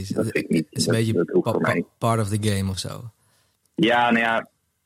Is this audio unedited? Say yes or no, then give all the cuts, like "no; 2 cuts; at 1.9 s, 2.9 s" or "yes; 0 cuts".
yes; 0 cuts